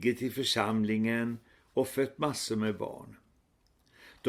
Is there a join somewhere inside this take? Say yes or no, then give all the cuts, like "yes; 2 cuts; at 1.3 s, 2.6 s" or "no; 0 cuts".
no; 0 cuts